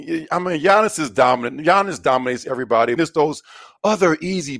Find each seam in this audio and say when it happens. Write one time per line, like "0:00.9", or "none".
0:03.0